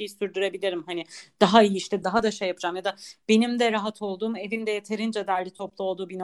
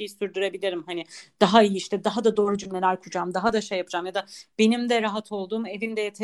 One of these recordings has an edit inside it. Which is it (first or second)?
first